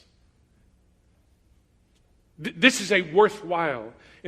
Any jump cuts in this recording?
no; 0 cuts

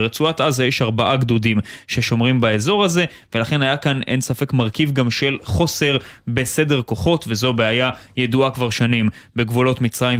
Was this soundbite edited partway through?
no; 0 cuts

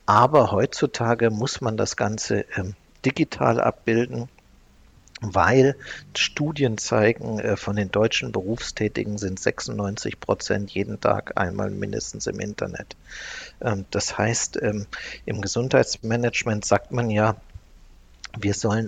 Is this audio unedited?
yes; 0 cuts

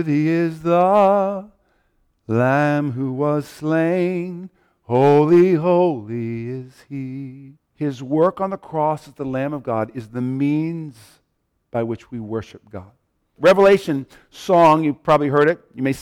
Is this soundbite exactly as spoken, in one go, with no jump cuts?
no; 2 cuts; at 7.5 s, 13.4 s

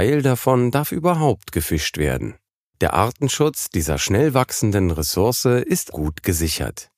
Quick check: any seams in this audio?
yes; 1 cut; at 5.9 s

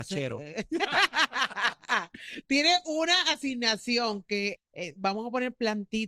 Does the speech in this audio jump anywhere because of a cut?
yes; 1 cut; at 4.6 s

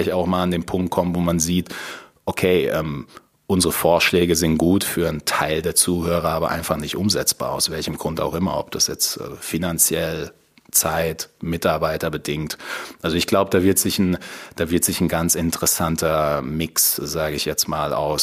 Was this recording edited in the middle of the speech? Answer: no; 0 cuts

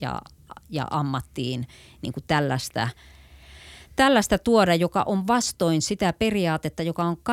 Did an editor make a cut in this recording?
no; 0 cuts

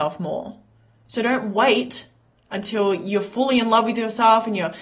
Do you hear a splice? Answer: no; 0 cuts

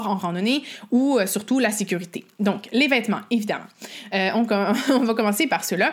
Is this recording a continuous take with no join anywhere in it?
yes; 0 cuts

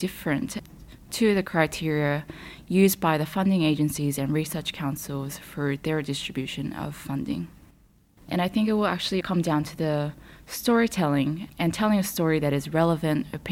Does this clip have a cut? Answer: yes; 2 cuts; at 8.2 s, 9.2 s

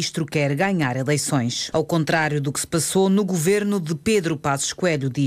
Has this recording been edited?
yes; 1 cut; at 1.7 s

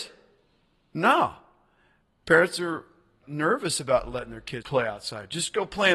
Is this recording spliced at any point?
yes; 2 cuts; at 3.2 s, 4.6 s

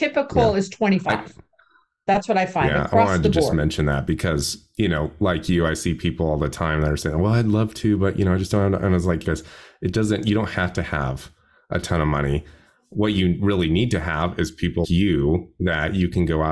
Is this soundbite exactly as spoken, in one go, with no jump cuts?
no; 2 cuts; at 9.2 s, 14.8 s

